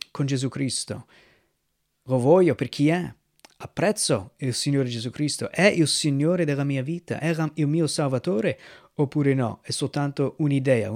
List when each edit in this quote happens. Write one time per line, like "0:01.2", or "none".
none